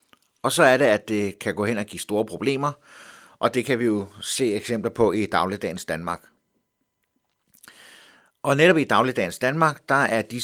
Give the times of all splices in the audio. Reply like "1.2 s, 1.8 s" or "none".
none

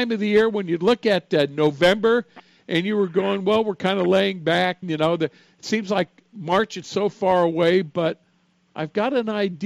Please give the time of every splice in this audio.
4.8 s

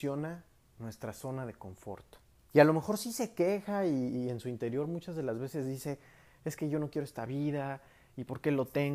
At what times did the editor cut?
2.5 s

